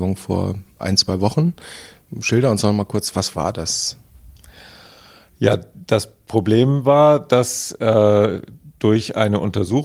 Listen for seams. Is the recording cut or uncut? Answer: uncut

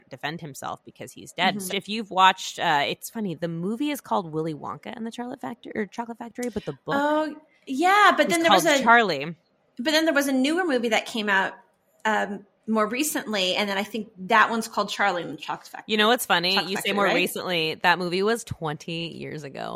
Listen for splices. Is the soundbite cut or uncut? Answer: cut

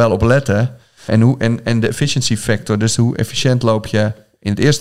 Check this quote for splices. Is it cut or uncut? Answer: cut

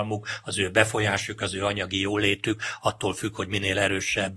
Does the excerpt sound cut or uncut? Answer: uncut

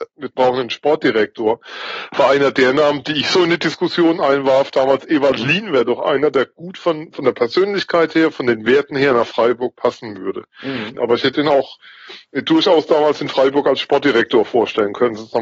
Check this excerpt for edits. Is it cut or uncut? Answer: cut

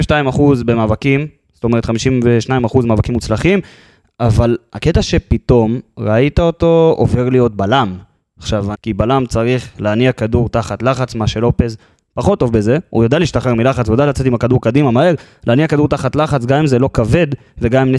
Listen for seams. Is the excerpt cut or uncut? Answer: cut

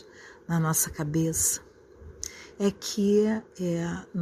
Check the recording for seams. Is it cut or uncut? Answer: cut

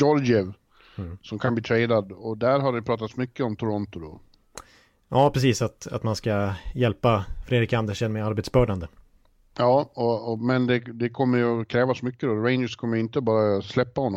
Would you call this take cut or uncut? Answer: uncut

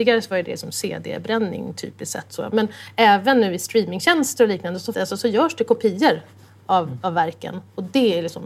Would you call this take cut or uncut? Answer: cut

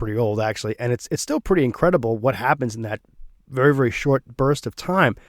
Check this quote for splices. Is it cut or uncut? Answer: uncut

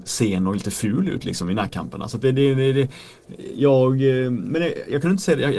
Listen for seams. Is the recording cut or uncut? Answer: uncut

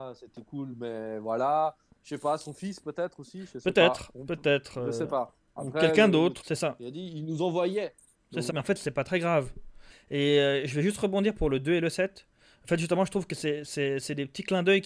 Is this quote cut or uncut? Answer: cut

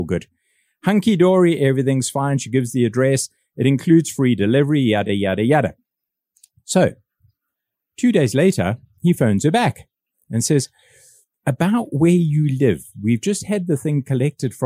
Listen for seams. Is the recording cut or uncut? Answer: uncut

